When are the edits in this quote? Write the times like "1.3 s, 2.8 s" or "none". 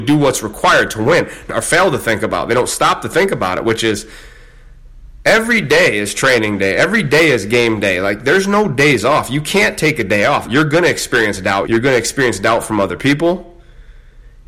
1.5 s, 10.4 s, 11.6 s